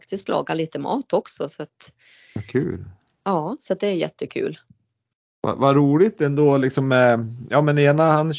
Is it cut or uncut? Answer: uncut